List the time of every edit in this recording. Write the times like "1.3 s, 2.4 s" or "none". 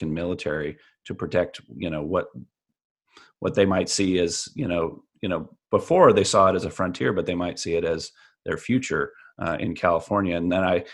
none